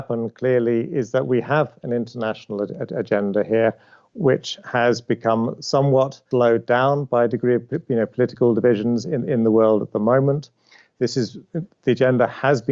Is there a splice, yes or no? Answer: no